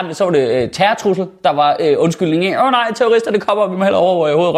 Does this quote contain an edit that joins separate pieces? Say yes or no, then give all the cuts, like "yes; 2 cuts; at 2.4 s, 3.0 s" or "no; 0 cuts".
no; 0 cuts